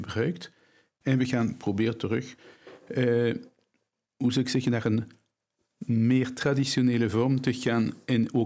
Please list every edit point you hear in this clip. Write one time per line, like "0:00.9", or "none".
0:01.0

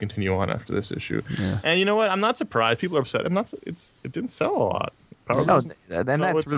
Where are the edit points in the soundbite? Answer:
none

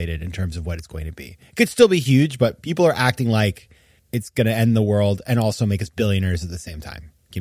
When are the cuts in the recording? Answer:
0:04.0

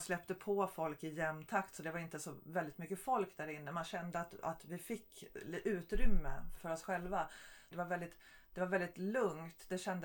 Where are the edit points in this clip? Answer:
0:06.6
0:07.7

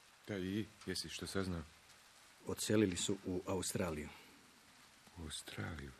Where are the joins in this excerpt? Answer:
0:02.4

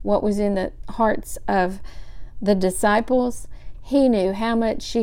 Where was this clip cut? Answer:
0:03.7

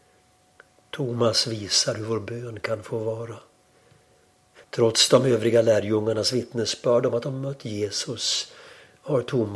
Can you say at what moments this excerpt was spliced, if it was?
0:04.6

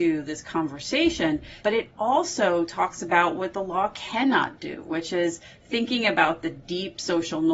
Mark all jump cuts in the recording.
0:01.6

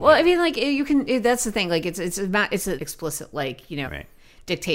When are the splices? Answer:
0:02.8
0:03.8

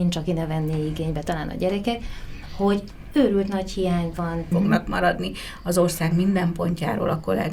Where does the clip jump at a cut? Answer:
0:04.5

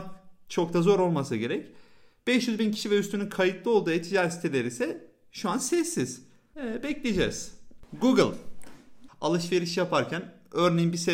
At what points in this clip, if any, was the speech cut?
0:06.5
0:09.1

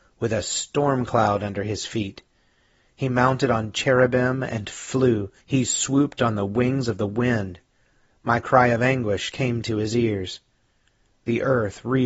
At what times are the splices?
0:05.4
0:08.1

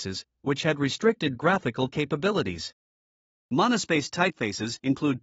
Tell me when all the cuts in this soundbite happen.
none

